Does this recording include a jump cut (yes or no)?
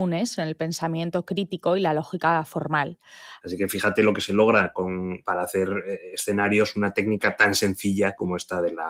yes